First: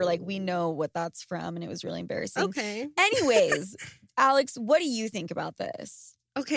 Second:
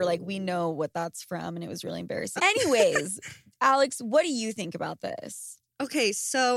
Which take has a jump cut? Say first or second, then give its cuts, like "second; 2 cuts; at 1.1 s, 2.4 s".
second; 1 cut; at 2.4 s